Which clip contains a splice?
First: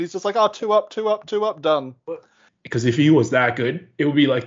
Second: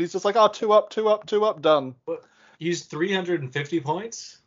first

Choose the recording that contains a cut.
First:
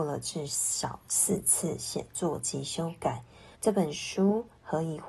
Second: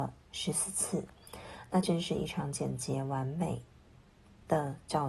first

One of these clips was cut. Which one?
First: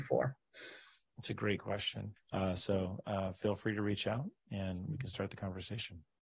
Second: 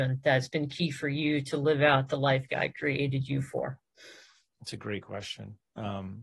first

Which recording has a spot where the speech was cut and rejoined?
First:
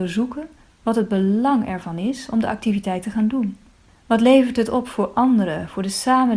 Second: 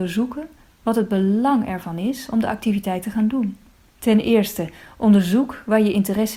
second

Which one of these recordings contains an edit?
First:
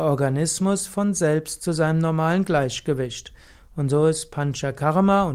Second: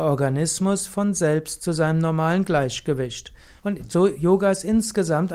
second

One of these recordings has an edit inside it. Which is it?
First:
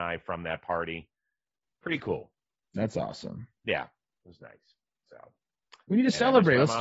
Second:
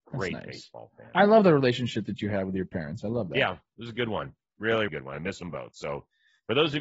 second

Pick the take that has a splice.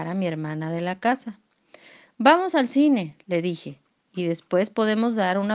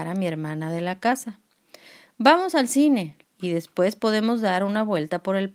second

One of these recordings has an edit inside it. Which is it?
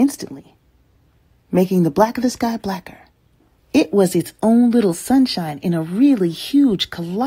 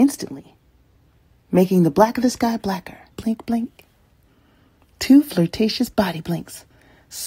second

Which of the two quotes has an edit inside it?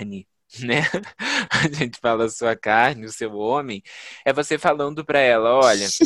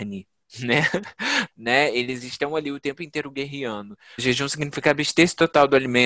second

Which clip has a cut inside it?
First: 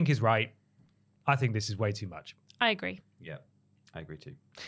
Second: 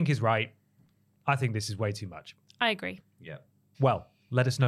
second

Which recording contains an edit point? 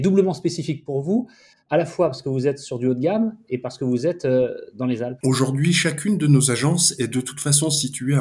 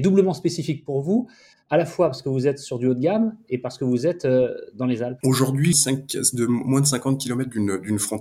second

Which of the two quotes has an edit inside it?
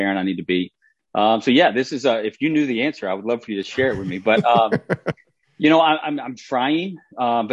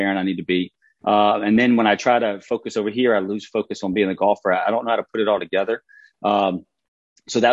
second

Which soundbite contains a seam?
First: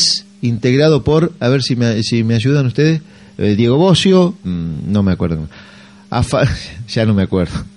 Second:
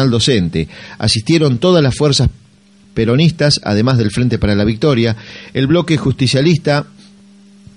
first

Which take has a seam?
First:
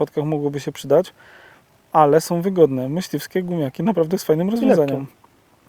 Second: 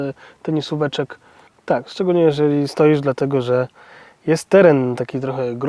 second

